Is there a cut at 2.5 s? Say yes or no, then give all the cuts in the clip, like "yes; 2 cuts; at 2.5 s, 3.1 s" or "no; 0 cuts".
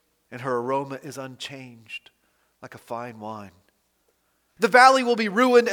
no; 1 cut; at 4.6 s